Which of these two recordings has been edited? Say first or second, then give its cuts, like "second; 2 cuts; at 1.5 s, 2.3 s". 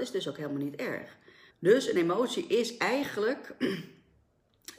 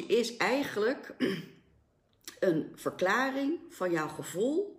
first; 1 cut; at 1.5 s